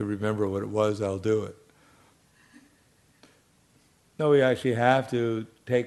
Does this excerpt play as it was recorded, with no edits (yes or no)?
yes